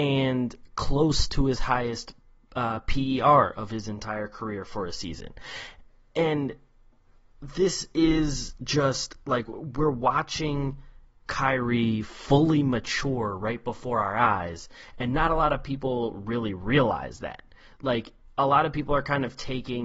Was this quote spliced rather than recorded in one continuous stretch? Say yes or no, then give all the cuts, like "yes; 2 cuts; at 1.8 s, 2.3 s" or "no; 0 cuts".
no; 0 cuts